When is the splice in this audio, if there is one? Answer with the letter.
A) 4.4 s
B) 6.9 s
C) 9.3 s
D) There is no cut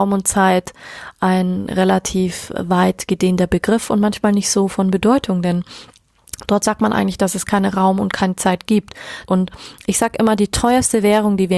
C